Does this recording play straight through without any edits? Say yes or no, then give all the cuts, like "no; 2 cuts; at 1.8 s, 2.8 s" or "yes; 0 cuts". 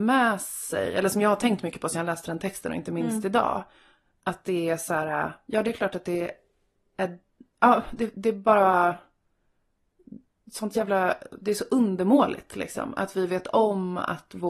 yes; 0 cuts